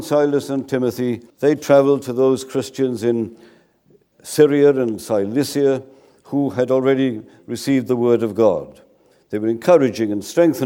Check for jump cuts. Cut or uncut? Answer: cut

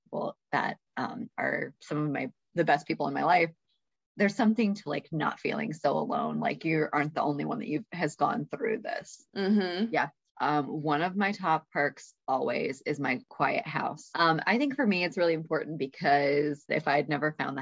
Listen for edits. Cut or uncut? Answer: cut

